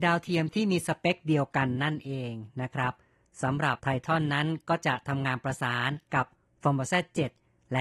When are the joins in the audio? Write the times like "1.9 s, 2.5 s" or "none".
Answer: 3.8 s